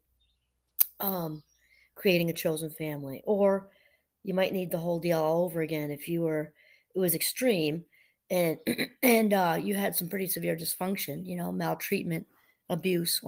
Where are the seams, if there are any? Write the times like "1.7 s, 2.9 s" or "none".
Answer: none